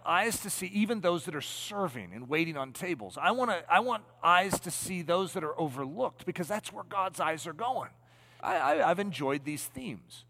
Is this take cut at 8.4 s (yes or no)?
yes